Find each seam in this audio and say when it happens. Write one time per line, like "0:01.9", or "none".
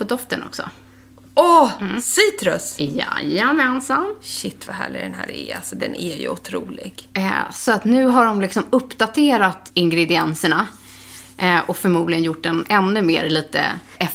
none

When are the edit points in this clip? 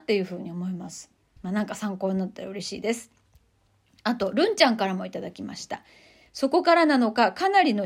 0:01.4
0:06.3

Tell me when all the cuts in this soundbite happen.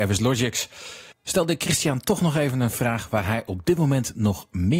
0:01.1

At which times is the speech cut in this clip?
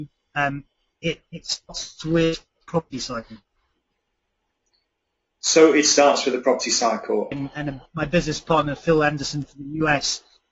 0:07.3

